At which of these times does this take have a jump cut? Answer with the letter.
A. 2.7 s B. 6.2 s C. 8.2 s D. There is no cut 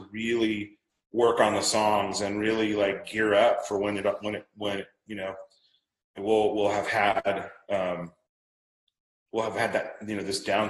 B